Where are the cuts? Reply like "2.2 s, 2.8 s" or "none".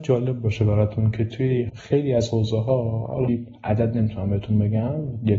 3.3 s